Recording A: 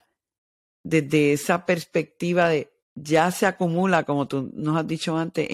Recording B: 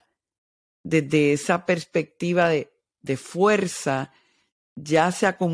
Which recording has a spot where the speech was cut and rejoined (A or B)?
A